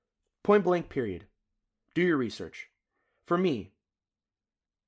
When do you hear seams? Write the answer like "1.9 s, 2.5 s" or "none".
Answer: none

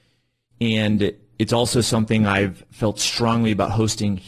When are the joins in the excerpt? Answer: none

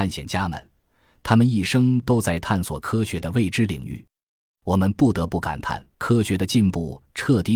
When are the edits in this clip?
4.5 s, 5.9 s

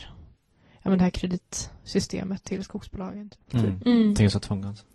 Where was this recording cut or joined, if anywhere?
3.5 s

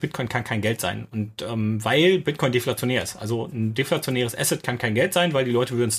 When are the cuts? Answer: none

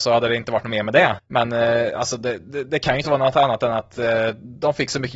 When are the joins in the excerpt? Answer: 1.2 s

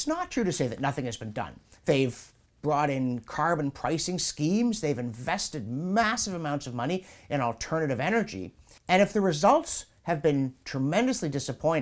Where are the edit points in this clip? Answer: 1.8 s, 8.8 s

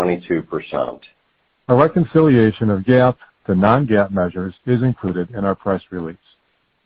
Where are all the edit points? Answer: 1.6 s

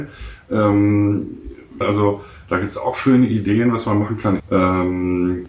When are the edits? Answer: 1.8 s, 4.4 s

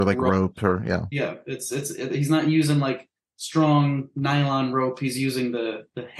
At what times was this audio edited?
none

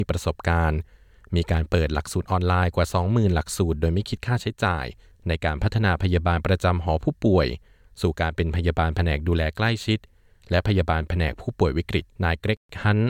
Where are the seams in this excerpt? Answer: 12.1 s

